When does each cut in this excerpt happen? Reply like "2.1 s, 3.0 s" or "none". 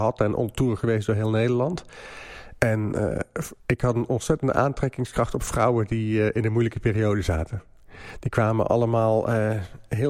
3.6 s